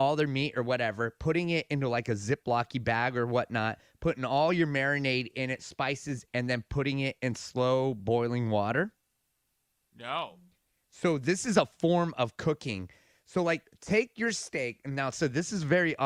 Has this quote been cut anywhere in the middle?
yes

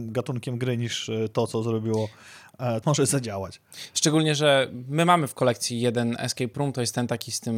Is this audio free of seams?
no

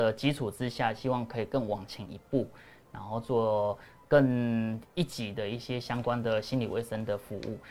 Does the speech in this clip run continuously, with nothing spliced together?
no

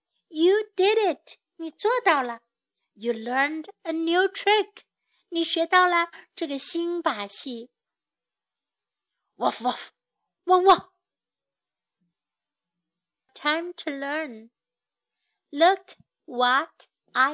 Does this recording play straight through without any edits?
no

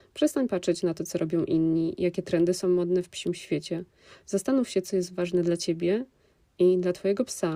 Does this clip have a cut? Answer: no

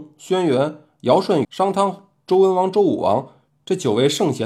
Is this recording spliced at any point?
yes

